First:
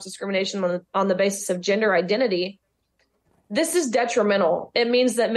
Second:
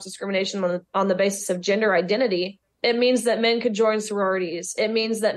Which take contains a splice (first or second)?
second